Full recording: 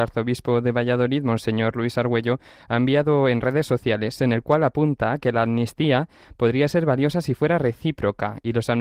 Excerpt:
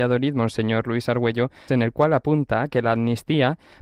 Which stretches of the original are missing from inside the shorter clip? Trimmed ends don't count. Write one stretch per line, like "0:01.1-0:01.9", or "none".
0:02.6-0:04.2